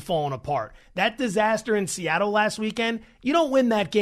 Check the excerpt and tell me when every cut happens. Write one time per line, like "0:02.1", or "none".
none